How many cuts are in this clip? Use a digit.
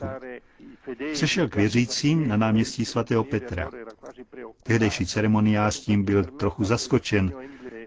0